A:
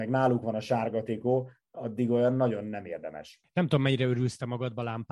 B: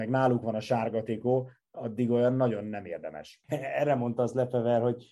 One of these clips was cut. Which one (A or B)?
B